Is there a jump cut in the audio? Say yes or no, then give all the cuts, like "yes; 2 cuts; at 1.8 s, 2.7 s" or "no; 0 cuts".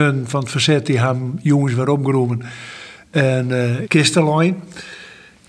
yes; 1 cut; at 3.8 s